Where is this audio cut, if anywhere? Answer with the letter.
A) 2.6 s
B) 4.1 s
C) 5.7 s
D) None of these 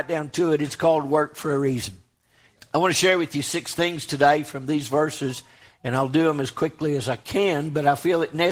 A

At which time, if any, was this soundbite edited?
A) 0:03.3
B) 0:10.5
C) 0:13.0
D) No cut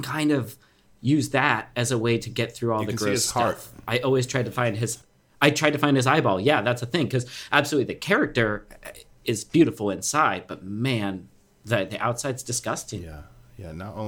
D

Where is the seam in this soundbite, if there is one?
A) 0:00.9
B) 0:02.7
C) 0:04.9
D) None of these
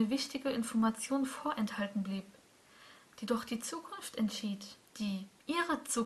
C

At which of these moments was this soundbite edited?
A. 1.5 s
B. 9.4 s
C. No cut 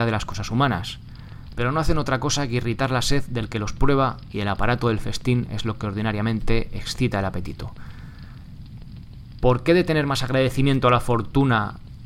A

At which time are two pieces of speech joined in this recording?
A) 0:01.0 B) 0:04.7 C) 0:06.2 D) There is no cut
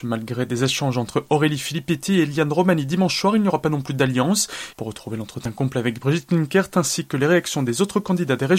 B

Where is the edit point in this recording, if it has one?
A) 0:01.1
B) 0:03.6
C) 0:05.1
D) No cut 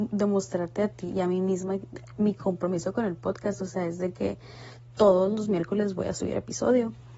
A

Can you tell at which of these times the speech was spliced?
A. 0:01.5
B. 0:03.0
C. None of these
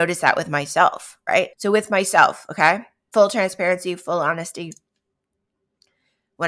A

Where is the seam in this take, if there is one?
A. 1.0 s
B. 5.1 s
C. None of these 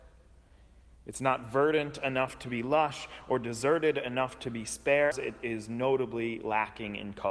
B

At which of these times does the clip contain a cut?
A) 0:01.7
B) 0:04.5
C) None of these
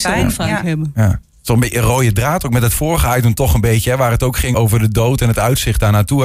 B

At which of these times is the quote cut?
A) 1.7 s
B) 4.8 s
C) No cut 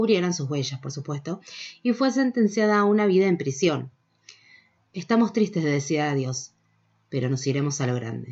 B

